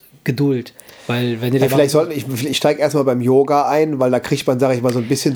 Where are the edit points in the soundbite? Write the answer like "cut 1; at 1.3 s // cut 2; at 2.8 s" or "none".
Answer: none